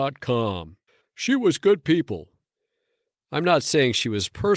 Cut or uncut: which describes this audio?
cut